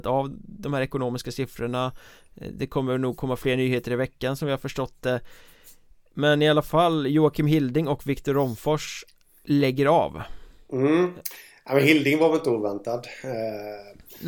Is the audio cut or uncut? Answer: uncut